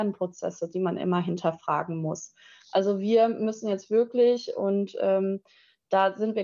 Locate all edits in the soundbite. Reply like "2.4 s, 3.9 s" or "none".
none